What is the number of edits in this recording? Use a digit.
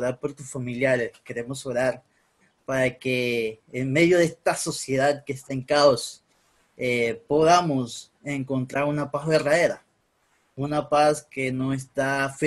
0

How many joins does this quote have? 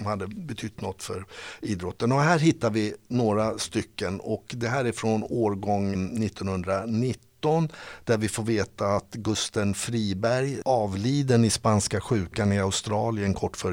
2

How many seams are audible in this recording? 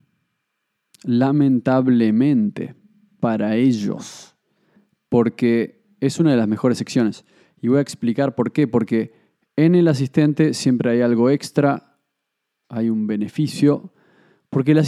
0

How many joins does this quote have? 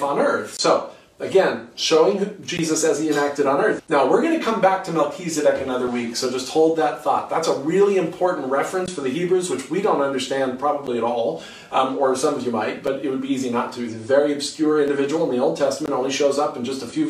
1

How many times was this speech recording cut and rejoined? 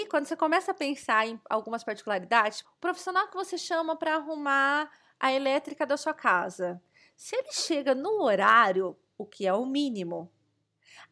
1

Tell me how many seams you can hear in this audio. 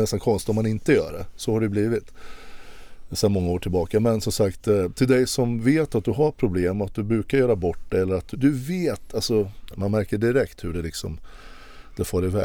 2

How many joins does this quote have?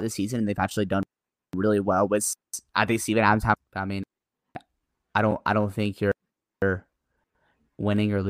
0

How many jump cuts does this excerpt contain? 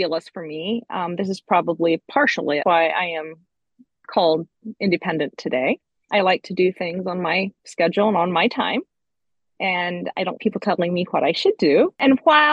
2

